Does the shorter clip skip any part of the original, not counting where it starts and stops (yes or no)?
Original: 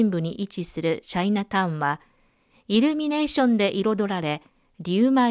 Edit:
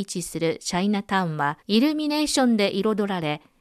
yes